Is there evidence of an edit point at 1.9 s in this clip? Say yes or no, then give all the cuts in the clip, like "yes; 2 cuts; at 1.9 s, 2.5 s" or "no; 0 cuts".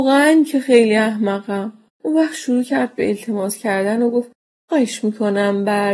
yes; 1 cut; at 1.9 s